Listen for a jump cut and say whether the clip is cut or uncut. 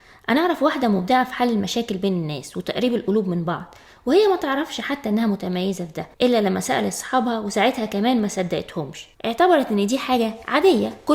cut